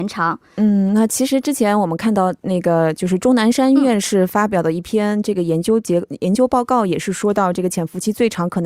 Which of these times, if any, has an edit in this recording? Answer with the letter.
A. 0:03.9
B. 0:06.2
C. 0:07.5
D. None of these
D